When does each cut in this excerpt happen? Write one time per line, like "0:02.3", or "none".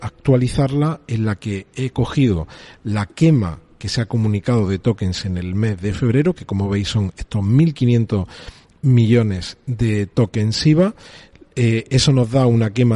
none